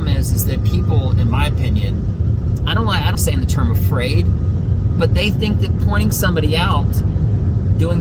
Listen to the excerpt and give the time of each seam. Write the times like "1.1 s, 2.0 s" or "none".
3.1 s